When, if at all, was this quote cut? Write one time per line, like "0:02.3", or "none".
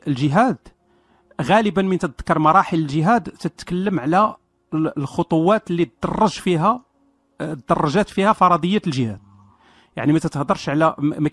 none